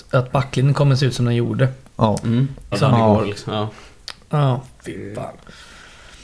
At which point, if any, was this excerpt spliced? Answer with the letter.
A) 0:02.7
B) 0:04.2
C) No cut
A